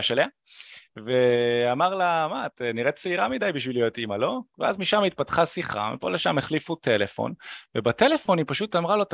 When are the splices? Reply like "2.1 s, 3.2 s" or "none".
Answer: none